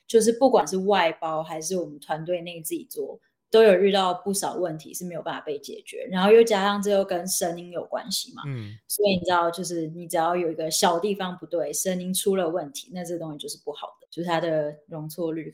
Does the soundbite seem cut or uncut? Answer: uncut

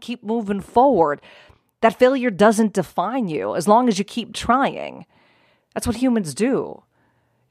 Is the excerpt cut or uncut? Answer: uncut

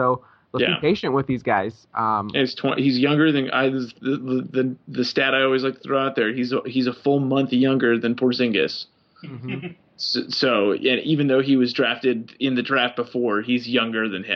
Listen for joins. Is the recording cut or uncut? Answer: uncut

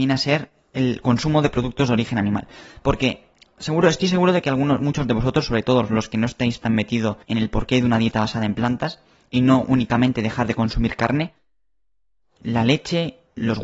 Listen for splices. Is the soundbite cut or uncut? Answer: cut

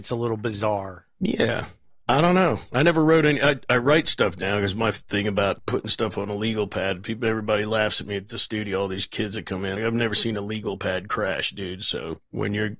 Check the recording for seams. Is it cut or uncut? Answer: cut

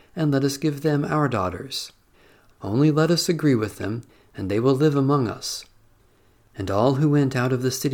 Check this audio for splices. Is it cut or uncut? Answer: cut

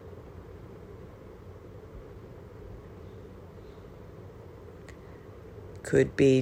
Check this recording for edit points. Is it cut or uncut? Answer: uncut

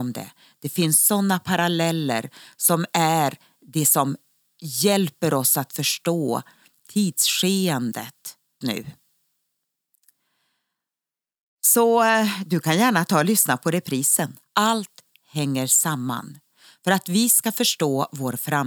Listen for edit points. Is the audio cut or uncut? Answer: cut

